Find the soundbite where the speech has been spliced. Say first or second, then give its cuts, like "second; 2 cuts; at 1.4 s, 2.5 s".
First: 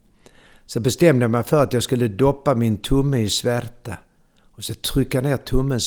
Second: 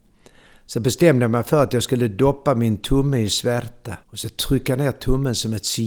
second; 1 cut; at 4.0 s